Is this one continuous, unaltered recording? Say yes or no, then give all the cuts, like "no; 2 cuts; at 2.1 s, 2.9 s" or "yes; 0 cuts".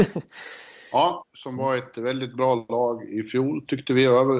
no; 1 cut; at 1.2 s